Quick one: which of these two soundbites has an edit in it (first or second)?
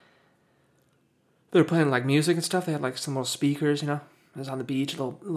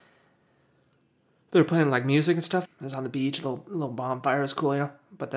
second